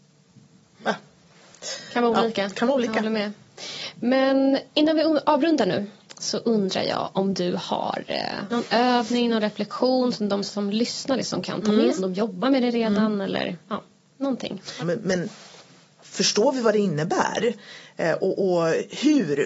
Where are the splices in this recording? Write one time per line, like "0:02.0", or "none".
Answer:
0:08.5
0:12.0
0:14.8